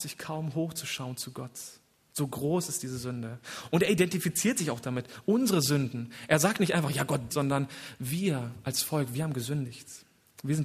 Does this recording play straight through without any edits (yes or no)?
no